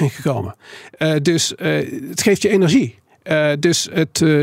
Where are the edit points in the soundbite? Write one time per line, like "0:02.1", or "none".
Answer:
none